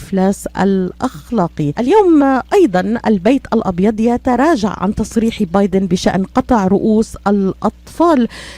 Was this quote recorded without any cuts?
yes; 0 cuts

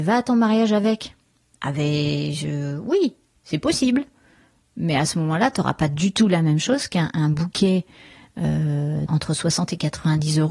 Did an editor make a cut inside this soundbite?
yes; 1 cut; at 9.1 s

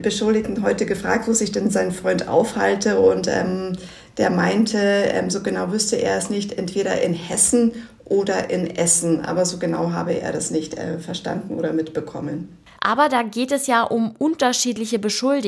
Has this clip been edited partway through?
yes; 1 cut; at 12.8 s

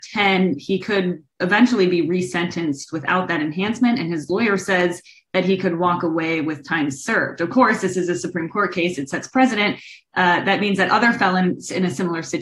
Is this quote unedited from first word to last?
yes; 0 cuts

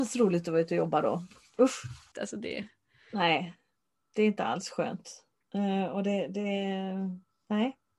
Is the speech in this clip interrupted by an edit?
yes; 1 cut; at 2.1 s

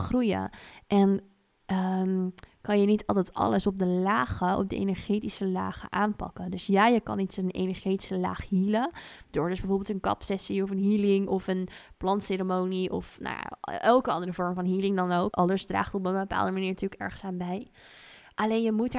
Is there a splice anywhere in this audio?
yes; 1 cut; at 15.3 s

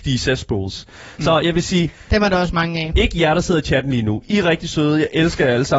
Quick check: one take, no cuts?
yes; 0 cuts

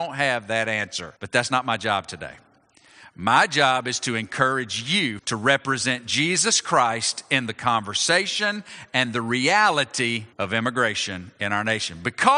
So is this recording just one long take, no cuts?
no; 3 cuts; at 1.2 s, 5.2 s, 10.3 s

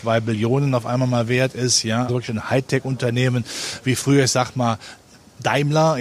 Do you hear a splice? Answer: yes; 1 cut; at 2.1 s

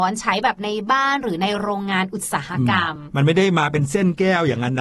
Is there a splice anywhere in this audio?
no; 0 cuts

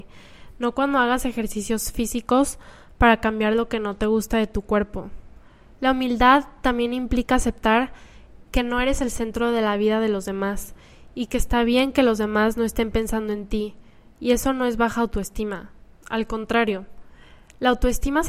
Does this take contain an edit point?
yes; 1 cut; at 5.7 s

